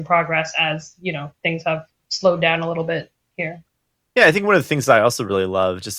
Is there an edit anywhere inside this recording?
no; 0 cuts

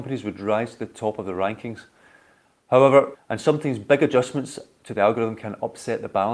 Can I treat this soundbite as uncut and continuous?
no; 1 cut; at 3.1 s

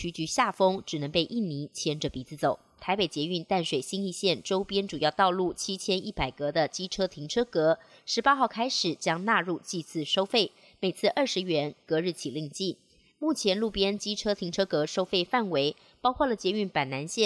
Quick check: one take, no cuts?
no; 1 cut; at 2.8 s

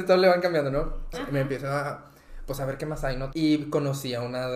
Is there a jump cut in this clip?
yes; 2 cuts; at 1.1 s, 3.3 s

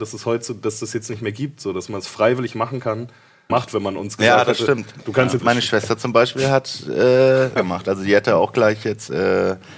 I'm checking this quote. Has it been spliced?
yes; 3 cuts; at 3.5 s, 5.4 s, 7.6 s

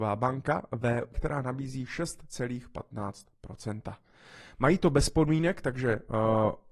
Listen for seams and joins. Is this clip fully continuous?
no; 1 cut; at 1.1 s

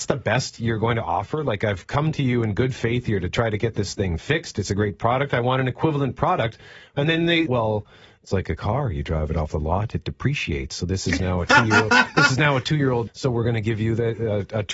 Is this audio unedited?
no; 2 cuts; at 7.5 s, 13.1 s

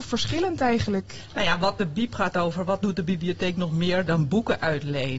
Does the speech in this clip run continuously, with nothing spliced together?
yes; 0 cuts

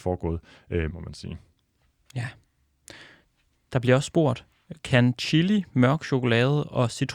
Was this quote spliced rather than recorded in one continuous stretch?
yes; 1 cut; at 0.9 s

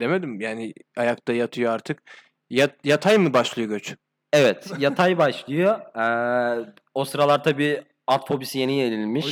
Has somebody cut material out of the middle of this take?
no; 0 cuts

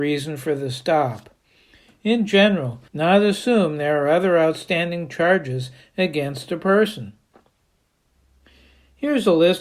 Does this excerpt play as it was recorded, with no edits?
no; 1 cut; at 2.9 s

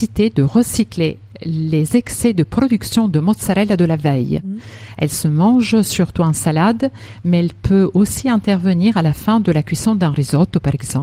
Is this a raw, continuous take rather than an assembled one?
yes; 0 cuts

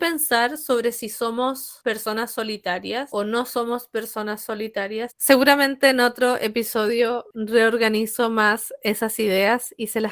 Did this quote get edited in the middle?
yes; 2 cuts; at 5.1 s, 7.3 s

